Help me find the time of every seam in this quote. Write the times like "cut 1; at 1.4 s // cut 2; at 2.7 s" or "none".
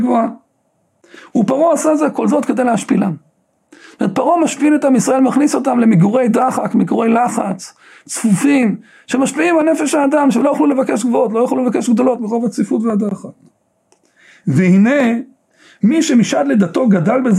none